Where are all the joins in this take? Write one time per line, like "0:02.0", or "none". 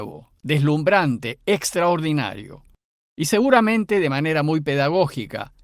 none